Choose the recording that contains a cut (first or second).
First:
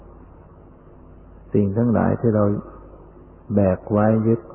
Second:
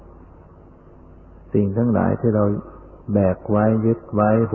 second